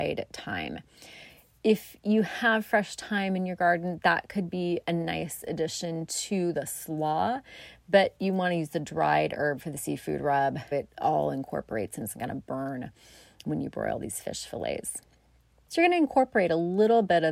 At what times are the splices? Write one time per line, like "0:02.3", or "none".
0:10.7
0:15.7